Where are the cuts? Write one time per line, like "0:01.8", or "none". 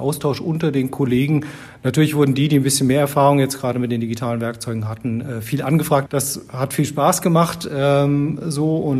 0:06.1